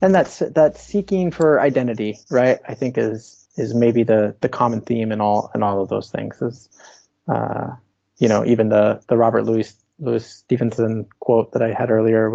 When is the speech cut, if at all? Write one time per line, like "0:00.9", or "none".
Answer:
0:03.5